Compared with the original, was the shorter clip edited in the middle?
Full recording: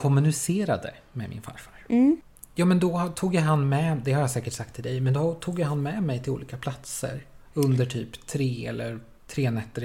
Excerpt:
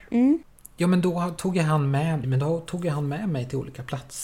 yes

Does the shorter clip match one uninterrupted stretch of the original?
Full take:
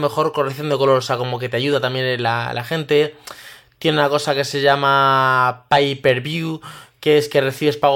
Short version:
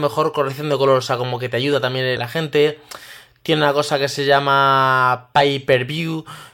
no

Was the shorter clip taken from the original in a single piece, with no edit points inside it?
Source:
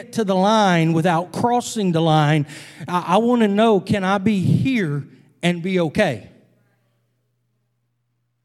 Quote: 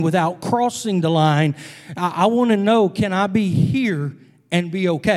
yes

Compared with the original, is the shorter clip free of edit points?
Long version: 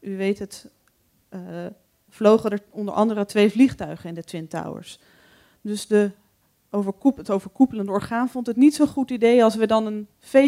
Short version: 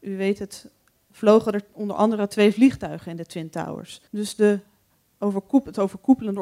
no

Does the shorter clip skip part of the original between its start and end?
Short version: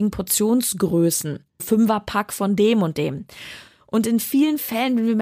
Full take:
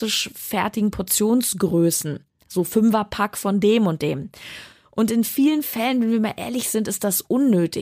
yes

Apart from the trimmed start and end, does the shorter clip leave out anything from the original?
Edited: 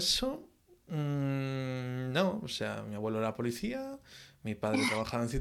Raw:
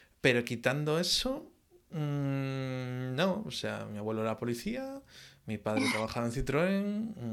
no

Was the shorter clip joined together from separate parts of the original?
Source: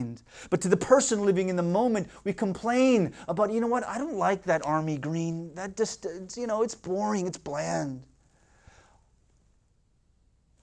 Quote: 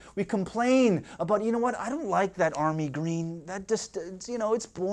no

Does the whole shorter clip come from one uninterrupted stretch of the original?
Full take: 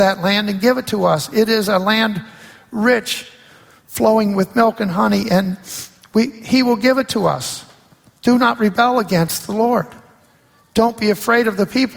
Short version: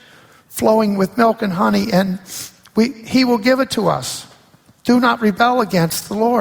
yes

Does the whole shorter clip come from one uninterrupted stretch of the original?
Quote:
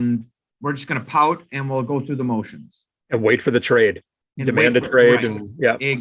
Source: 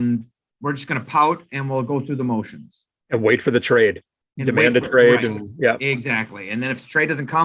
yes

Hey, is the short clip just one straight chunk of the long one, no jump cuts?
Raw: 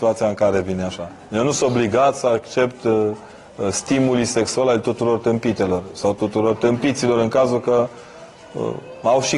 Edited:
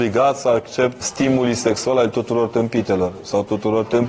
no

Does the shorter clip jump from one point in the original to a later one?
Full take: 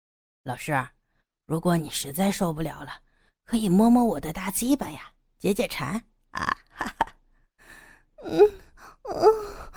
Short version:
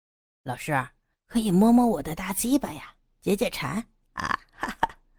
yes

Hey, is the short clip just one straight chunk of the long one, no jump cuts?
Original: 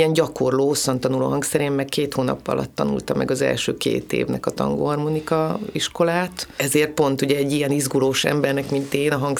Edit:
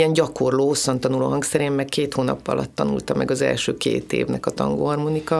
yes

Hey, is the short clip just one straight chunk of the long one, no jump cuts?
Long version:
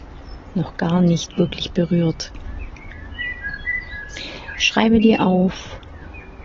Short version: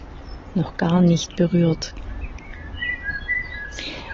no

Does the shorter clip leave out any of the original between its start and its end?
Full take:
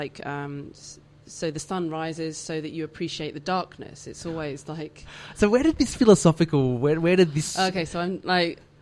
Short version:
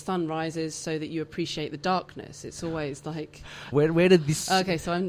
yes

